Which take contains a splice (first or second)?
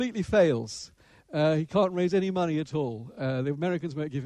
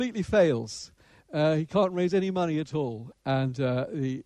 second